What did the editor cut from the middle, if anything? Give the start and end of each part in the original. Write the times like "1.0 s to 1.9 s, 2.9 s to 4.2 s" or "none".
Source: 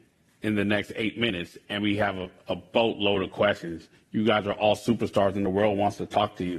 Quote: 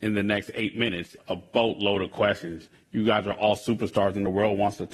1.6 s to 2.4 s